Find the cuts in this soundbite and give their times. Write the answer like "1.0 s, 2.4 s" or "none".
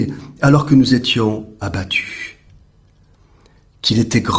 none